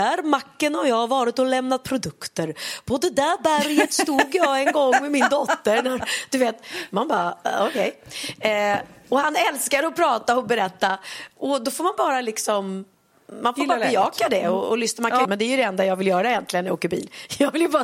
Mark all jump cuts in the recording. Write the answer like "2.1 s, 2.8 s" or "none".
15.2 s